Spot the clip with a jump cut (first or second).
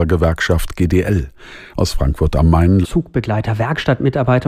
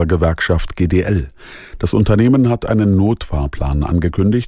first